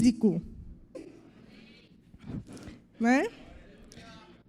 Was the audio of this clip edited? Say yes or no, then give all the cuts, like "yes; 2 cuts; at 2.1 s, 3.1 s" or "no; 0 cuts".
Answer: yes; 2 cuts; at 0.9 s, 2.9 s